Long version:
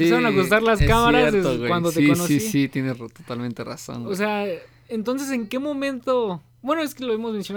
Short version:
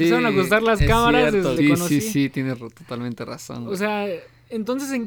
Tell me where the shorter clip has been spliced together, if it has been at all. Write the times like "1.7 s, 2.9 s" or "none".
1.6 s